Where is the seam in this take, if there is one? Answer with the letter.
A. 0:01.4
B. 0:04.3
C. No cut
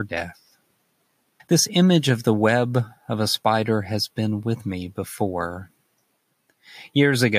A